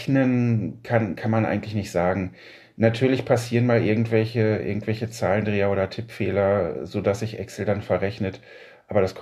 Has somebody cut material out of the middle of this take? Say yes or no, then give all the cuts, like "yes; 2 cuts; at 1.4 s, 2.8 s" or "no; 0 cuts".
no; 0 cuts